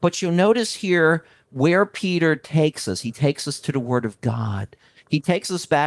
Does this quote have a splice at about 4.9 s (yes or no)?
no